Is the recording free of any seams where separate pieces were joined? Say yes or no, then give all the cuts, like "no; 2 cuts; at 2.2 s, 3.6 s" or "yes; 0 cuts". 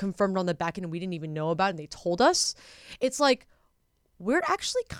yes; 0 cuts